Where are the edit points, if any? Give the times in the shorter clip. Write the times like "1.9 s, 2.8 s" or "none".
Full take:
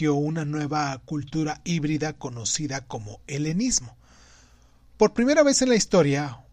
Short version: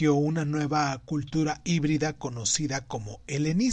none